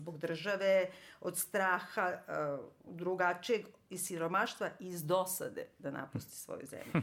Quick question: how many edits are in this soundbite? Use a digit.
1